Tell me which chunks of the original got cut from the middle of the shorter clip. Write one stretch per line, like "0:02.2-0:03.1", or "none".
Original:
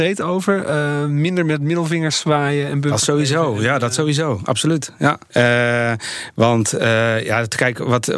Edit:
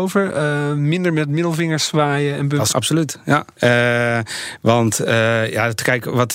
0:03.0-0:04.5